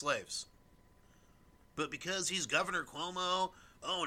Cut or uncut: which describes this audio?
cut